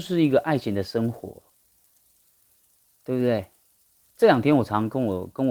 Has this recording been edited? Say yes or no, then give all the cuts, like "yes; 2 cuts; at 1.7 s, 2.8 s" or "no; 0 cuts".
yes; 1 cut; at 4.1 s